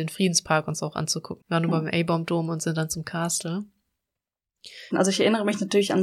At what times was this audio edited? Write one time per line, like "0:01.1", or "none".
0:01.4
0:04.9